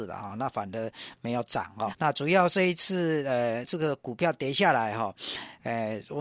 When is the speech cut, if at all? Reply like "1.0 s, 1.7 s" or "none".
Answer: 1.9 s, 3.6 s